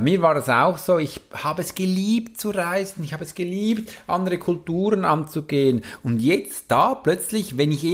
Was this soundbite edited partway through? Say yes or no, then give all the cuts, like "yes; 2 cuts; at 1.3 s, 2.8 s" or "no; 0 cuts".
no; 0 cuts